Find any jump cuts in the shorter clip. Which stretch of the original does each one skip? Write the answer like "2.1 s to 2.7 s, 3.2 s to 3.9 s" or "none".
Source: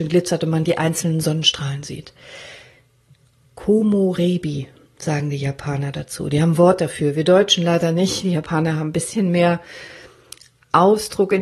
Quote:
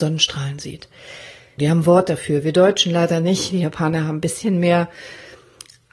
2.8 s to 6.3 s